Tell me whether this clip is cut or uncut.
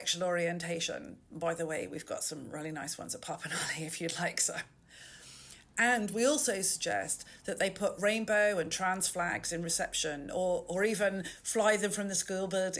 uncut